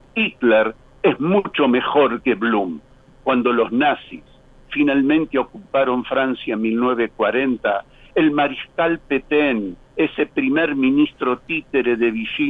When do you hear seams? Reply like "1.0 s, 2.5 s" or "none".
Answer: none